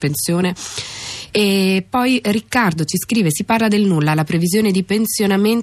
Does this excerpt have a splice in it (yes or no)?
no